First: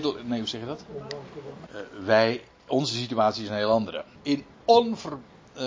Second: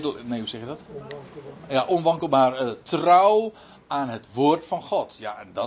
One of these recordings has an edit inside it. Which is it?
first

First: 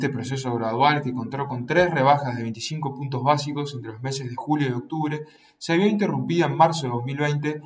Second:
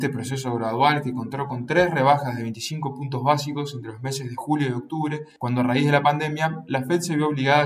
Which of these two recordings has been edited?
second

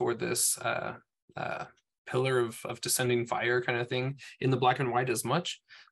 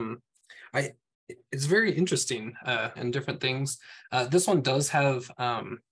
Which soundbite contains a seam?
second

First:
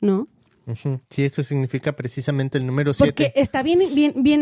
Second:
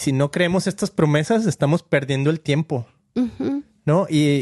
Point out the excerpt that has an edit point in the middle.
first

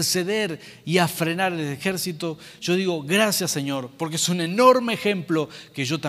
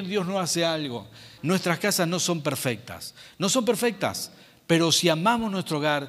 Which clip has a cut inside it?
second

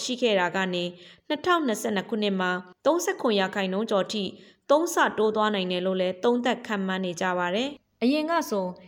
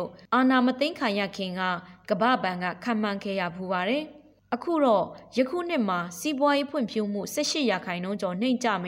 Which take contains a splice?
first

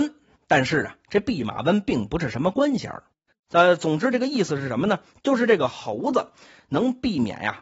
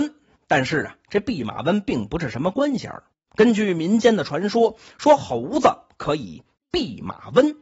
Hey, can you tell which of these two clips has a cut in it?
first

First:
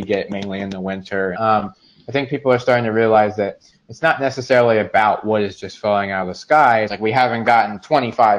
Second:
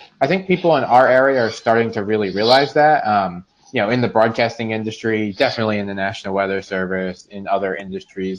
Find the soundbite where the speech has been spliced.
first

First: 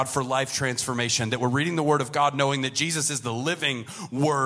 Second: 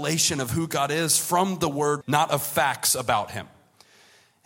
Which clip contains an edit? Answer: second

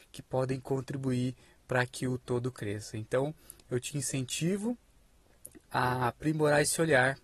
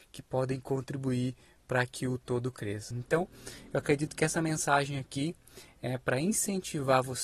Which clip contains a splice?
second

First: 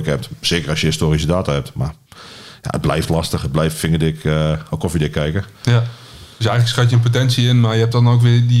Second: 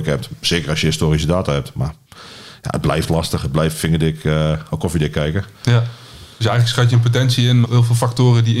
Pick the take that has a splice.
second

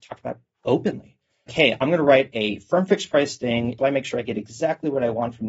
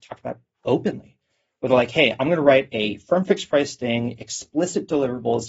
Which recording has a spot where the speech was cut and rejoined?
first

